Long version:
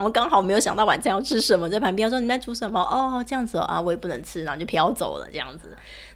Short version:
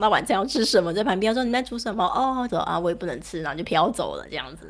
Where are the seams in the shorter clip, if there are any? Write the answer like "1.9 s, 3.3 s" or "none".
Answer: 2.5 s

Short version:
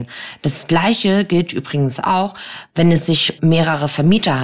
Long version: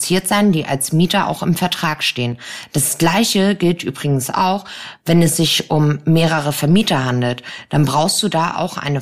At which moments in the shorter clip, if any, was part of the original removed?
3.4 s

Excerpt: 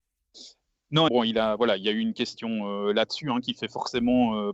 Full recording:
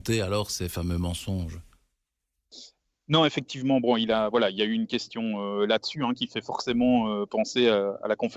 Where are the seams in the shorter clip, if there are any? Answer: 1.1 s

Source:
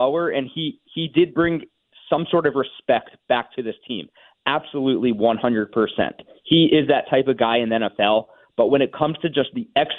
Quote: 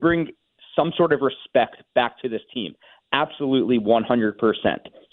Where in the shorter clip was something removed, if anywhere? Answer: none

